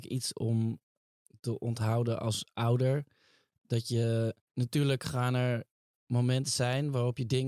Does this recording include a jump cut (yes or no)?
no